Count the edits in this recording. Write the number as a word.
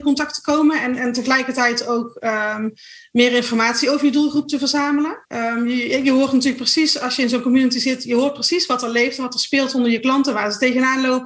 one